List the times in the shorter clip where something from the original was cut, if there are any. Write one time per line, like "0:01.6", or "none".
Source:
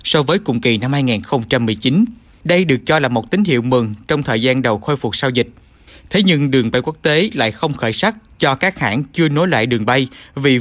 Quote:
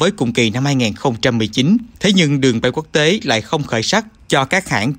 0:01.9